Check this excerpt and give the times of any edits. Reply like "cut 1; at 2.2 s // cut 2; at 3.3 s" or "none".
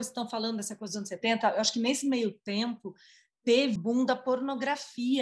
cut 1; at 3.8 s